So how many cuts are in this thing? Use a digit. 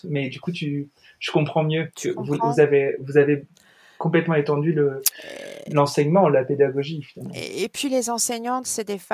0